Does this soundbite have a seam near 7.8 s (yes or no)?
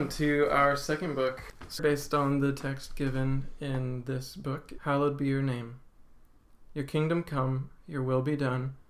no